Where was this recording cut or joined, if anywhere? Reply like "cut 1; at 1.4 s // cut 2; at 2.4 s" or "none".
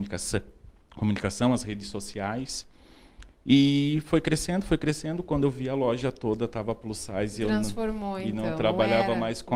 none